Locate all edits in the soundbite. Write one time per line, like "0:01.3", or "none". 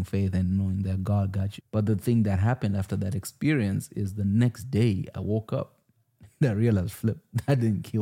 0:01.6